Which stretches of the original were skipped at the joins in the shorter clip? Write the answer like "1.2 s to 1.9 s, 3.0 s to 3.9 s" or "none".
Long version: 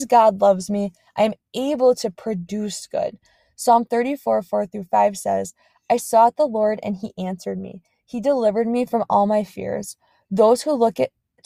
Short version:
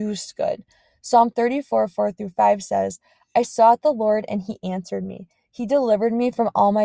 none